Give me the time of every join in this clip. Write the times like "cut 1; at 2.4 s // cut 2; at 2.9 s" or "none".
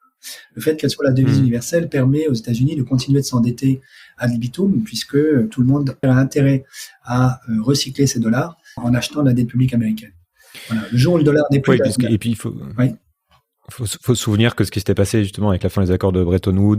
cut 1; at 6.0 s // cut 2; at 8.8 s